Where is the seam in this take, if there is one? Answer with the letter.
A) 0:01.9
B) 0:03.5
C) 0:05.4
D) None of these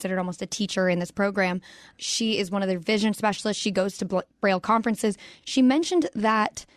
C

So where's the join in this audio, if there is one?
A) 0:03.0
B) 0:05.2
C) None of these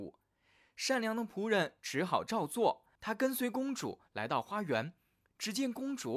A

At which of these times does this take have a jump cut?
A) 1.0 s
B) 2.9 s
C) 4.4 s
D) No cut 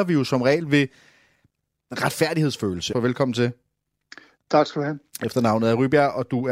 B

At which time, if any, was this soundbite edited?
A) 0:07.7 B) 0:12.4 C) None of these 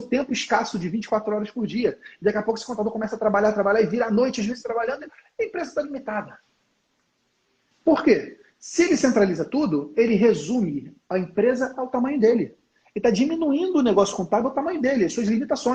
A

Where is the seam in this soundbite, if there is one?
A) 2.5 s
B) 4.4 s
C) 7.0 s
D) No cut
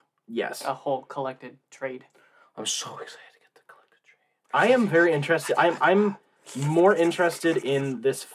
B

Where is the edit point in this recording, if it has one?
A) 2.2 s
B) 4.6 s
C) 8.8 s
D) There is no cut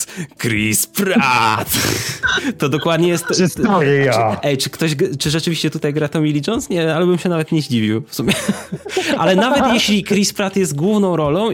D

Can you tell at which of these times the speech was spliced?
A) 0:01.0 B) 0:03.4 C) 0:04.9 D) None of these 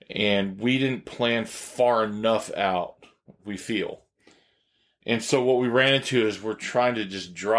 B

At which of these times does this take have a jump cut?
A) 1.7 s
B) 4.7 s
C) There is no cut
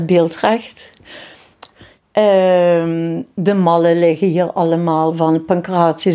A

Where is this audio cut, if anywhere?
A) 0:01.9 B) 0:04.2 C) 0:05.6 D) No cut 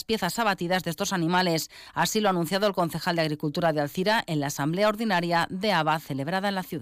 B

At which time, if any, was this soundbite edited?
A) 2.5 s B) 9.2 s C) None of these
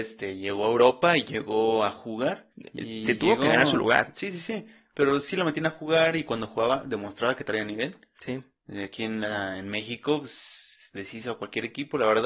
A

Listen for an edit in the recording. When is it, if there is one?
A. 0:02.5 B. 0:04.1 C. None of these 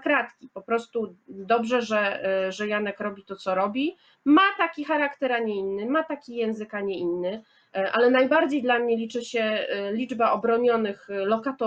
C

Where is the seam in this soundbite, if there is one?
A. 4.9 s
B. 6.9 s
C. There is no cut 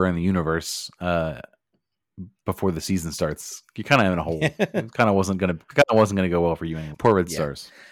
B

